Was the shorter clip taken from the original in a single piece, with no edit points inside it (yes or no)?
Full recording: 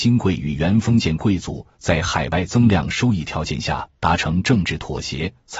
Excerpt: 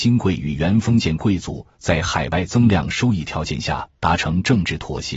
yes